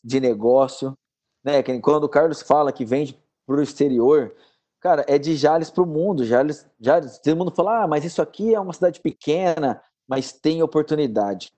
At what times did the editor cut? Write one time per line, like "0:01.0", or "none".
none

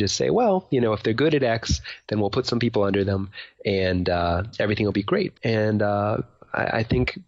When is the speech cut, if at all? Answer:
0:05.3

